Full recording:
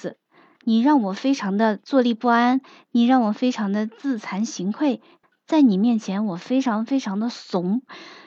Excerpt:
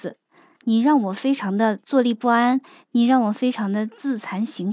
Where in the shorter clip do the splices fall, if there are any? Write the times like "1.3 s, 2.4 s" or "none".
none